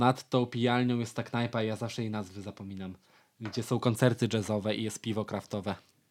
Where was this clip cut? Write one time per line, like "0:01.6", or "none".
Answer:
none